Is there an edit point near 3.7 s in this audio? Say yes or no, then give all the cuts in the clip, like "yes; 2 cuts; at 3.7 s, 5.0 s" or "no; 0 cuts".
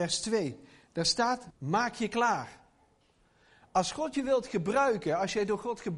no; 1 cut; at 1.5 s